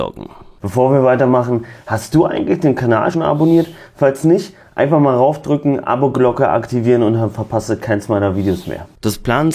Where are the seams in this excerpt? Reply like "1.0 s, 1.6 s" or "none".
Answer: 3.1 s